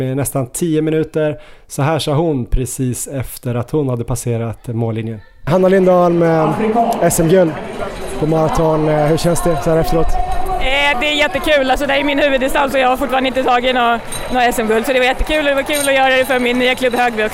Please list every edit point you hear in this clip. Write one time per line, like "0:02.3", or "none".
0:10.9

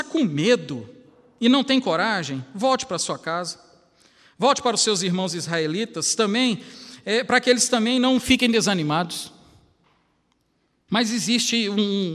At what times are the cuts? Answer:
0:10.9

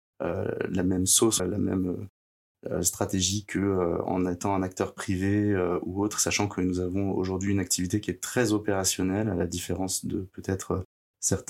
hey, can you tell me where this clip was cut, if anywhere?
0:01.4

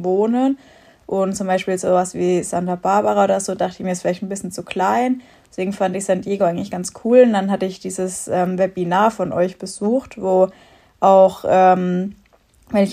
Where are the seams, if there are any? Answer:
none

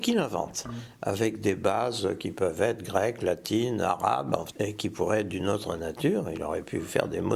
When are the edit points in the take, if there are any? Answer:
0:04.5

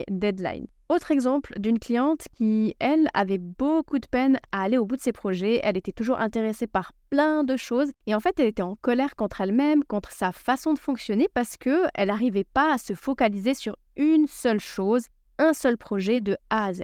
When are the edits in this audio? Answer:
none

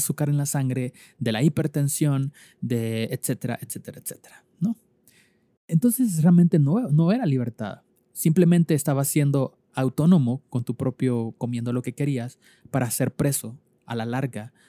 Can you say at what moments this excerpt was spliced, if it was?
0:05.6
0:11.4

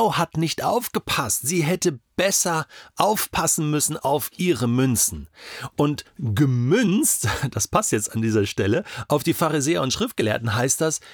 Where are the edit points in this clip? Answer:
none

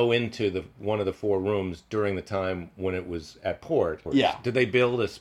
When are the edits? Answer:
0:04.1

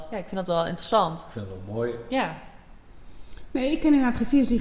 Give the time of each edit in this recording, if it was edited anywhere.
none

